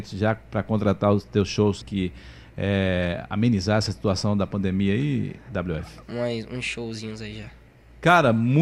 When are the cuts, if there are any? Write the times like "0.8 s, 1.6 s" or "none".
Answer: 1.8 s, 6.0 s